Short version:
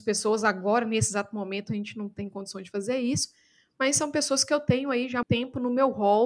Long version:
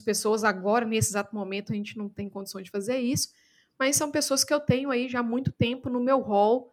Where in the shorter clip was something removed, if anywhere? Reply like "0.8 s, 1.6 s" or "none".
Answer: 5.2 s